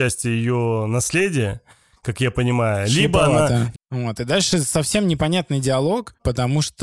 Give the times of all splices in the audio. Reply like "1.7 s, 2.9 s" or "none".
3.7 s